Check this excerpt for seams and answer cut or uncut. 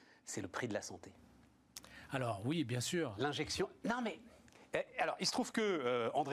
uncut